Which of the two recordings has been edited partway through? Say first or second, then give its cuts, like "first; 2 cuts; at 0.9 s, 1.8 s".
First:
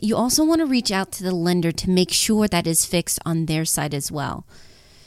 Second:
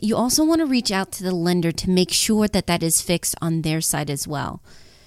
first; 1 cut; at 2.5 s